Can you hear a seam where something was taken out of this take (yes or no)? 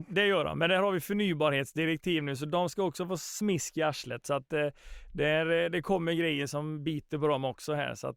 no